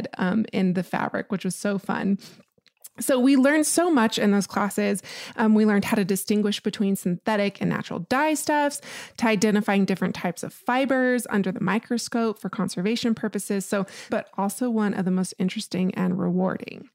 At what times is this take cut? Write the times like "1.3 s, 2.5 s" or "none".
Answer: 14.1 s